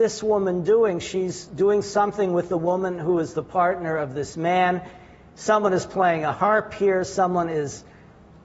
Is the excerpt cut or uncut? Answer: uncut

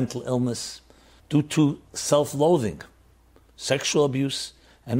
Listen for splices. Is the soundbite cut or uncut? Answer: cut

